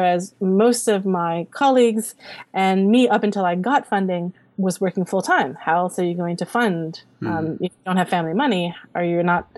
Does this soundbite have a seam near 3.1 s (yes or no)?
no